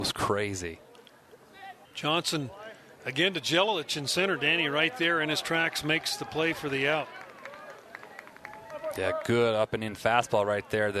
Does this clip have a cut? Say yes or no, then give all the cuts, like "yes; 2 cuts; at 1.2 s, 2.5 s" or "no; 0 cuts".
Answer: yes; 1 cut; at 1.8 s